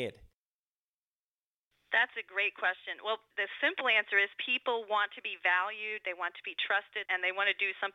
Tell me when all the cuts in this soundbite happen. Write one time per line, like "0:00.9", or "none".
0:03.3
0:07.0